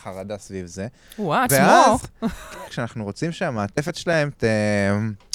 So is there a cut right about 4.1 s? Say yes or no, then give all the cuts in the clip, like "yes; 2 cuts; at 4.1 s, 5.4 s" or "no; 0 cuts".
no; 2 cuts; at 1.5 s, 2.7 s